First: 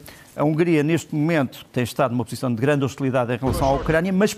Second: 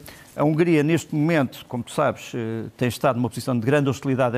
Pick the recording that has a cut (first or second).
first